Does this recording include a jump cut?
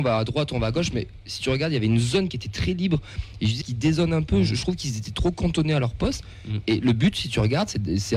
yes; 1 cut; at 3.6 s

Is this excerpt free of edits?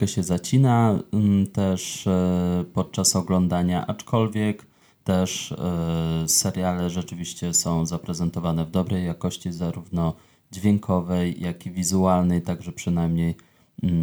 yes; 0 cuts

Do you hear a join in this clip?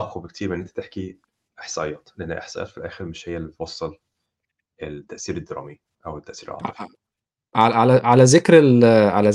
no; 0 cuts

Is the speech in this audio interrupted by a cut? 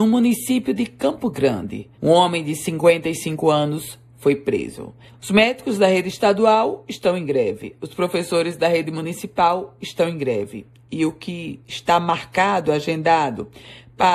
yes; 2 cuts; at 1.9 s, 5.1 s

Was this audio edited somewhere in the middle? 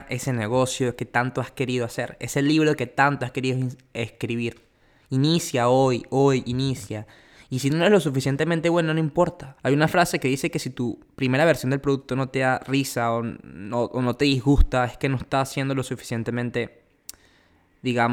yes; 1 cut; at 9.6 s

